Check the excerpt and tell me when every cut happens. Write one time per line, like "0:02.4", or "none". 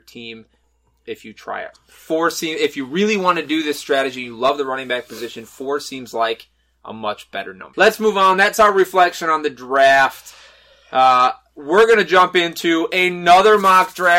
0:01.7